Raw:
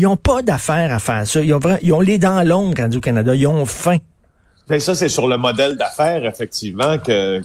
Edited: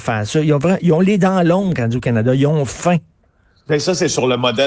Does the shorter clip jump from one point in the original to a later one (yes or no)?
no